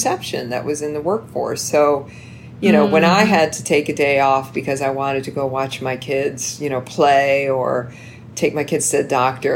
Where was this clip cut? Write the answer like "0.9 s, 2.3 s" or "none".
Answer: none